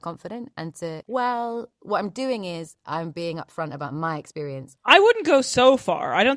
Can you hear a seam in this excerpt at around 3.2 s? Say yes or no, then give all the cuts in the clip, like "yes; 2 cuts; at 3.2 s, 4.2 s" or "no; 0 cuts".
no; 2 cuts; at 1.0 s, 4.8 s